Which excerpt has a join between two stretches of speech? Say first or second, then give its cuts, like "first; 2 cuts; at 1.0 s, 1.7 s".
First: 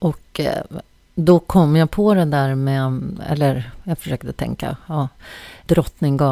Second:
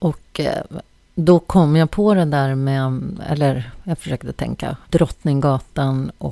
second; 1 cut; at 4.8 s